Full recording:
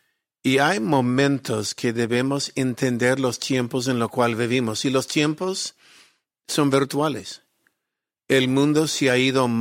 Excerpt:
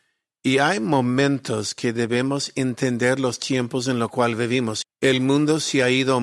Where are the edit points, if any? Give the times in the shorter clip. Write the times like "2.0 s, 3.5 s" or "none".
4.8 s

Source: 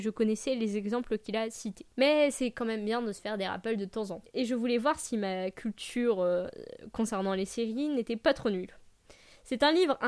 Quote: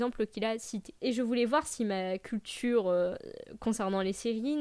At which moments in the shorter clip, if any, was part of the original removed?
1.0 s

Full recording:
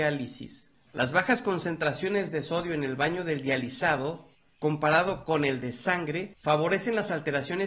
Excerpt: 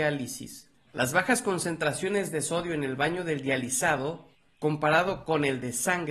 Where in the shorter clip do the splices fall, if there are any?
none

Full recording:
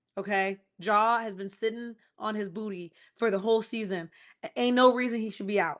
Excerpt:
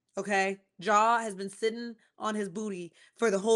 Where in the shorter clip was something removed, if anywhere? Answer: none

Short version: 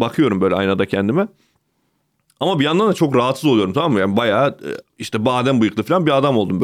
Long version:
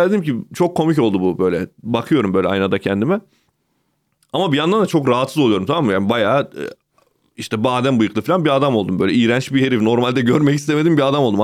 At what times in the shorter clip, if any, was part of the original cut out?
4.9 s

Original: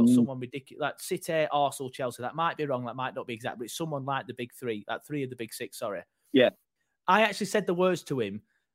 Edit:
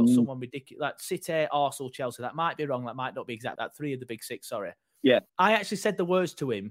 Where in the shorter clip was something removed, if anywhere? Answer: 3.6 s, 5.3 s

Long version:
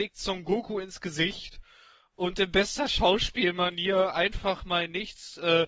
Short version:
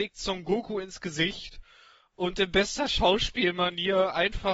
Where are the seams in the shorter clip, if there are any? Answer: none

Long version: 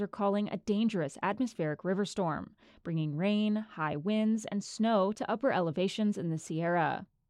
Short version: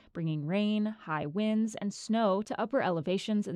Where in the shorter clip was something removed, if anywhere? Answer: none

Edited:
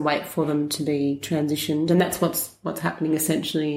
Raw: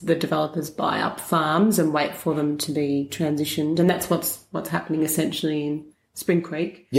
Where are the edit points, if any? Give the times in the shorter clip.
none

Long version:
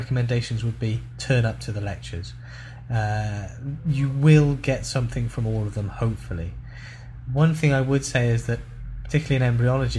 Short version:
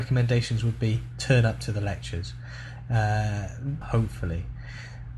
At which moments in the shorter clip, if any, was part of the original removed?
3.8 s

